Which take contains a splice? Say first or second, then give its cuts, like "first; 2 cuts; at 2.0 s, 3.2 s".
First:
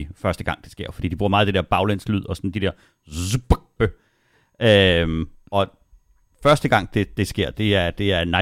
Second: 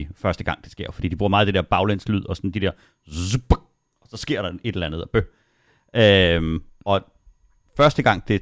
first; 1 cut; at 3.8 s